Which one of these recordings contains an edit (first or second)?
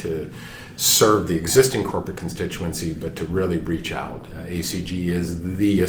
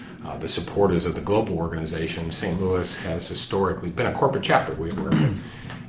second